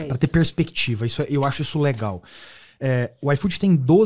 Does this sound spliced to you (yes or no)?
no